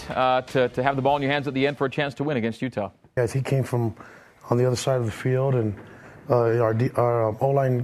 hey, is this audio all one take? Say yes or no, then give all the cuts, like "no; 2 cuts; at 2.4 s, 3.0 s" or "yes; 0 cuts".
no; 1 cut; at 3.2 s